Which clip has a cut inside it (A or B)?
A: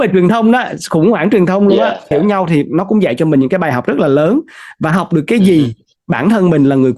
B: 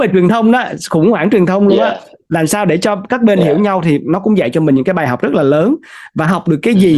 A